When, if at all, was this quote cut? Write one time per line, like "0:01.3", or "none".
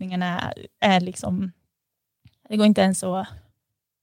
none